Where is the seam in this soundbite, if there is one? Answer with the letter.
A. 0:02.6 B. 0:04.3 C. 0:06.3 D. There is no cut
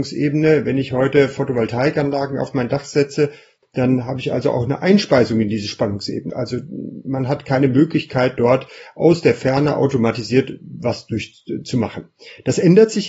C